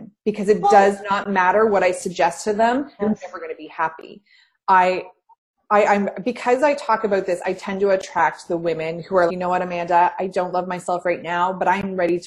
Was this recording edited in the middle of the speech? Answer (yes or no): yes